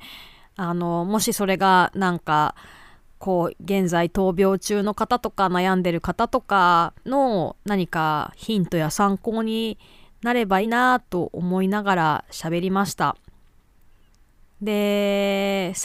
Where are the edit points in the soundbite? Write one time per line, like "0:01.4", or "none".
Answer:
0:07.0
0:10.6